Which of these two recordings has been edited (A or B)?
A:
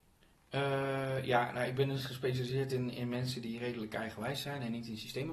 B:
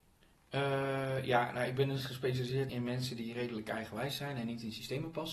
B